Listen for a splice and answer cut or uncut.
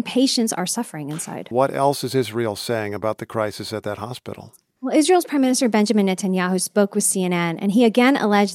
cut